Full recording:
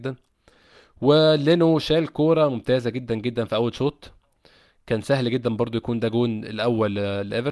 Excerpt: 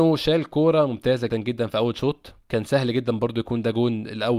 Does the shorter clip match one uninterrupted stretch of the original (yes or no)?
no